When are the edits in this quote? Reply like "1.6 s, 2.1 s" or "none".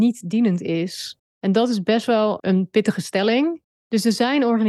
2.4 s, 3.8 s